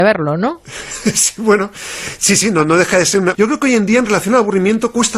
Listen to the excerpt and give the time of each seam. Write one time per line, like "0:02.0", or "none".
0:03.3